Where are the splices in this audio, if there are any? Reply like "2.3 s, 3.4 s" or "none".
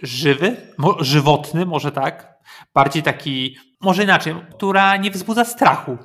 4.5 s